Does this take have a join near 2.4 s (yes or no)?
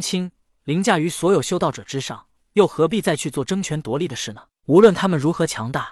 yes